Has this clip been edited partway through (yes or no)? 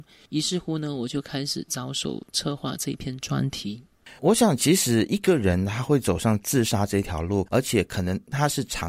yes